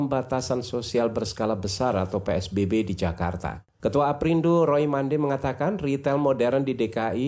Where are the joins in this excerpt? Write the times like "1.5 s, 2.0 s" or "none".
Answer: 3.7 s